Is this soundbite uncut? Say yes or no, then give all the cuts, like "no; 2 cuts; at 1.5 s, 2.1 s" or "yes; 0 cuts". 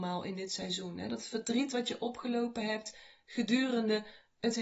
yes; 0 cuts